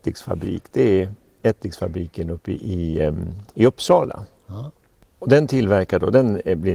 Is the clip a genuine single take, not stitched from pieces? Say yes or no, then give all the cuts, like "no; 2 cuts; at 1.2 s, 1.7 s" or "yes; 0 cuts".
yes; 0 cuts